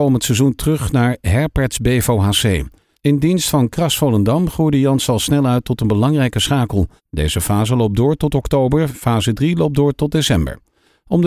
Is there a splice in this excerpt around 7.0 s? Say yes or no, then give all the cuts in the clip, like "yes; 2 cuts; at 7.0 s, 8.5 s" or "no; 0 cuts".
yes; 2 cuts; at 2.9 s, 7.0 s